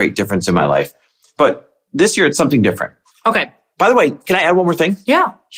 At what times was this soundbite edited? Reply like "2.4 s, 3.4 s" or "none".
3.1 s

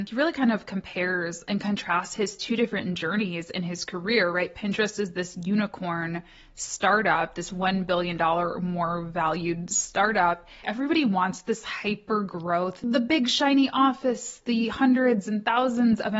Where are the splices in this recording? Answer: 10.6 s

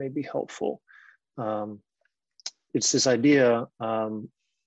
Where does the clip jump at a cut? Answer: 2.7 s

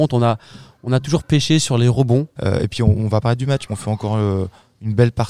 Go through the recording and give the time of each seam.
2.3 s, 3.7 s

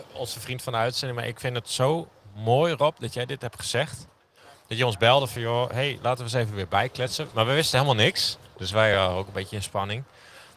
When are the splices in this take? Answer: none

